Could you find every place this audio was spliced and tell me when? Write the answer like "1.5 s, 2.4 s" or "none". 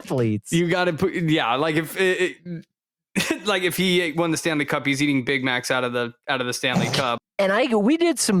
7.2 s

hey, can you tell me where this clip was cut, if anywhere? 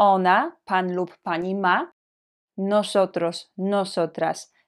none

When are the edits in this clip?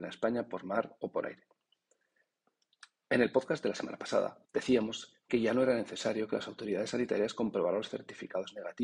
4.4 s

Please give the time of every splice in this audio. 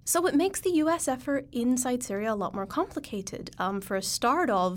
none

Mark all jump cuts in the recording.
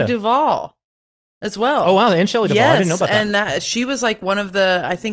none

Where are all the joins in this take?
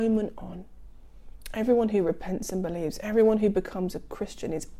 none

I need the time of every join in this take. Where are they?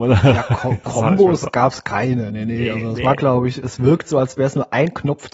none

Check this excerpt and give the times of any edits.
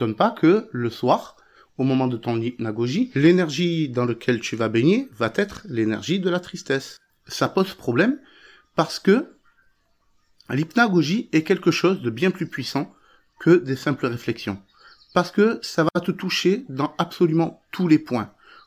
7.1 s

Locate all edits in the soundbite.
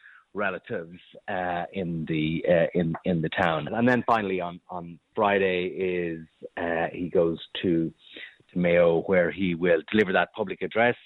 3.7 s

